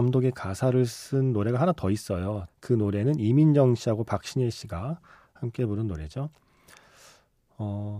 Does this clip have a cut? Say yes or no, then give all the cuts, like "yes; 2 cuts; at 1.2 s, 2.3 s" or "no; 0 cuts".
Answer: yes; 1 cut; at 2.5 s